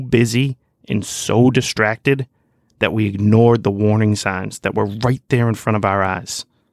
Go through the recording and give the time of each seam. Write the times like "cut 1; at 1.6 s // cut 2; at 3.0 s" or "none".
none